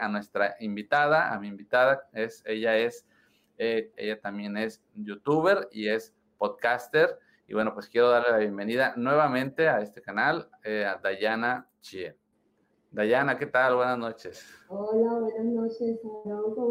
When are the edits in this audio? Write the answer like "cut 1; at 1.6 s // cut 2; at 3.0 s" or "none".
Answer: cut 1; at 3.9 s